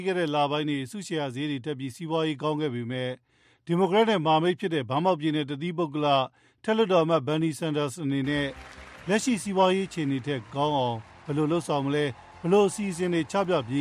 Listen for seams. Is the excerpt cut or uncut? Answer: uncut